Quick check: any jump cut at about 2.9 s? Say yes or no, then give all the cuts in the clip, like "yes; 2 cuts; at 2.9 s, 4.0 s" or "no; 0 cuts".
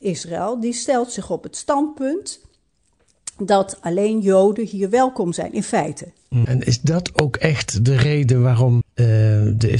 no; 2 cuts; at 6.4 s, 8.8 s